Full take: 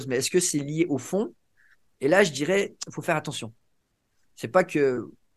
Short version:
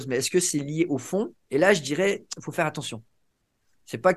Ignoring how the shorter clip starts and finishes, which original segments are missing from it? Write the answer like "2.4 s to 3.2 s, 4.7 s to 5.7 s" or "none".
1.4 s to 1.9 s